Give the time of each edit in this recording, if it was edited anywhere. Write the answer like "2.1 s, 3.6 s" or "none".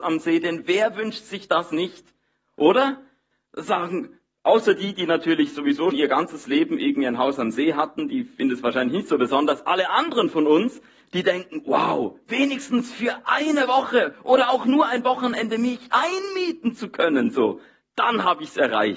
5.9 s